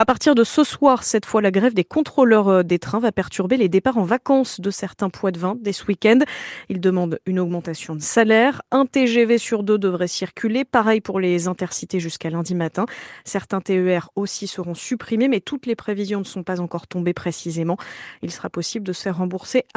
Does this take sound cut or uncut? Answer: uncut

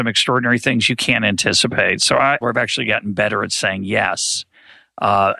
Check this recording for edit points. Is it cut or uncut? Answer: cut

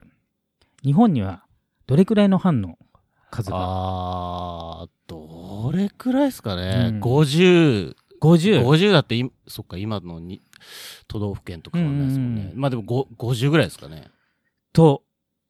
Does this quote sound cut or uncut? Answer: uncut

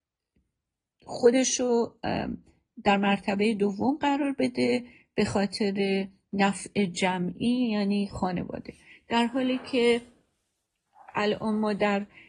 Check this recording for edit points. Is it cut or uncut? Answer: uncut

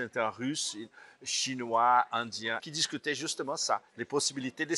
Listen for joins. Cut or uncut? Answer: cut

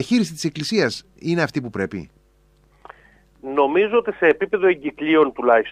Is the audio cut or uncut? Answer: uncut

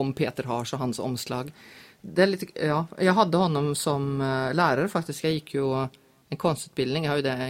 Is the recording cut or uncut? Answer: uncut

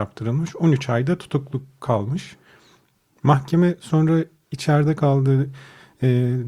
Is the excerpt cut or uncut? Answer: uncut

